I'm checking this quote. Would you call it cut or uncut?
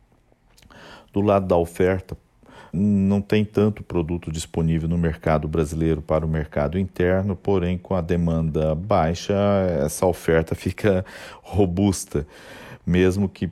cut